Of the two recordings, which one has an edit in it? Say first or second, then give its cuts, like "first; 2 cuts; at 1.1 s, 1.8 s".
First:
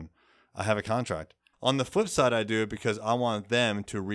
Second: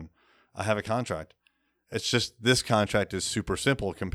first; 1 cut; at 1.5 s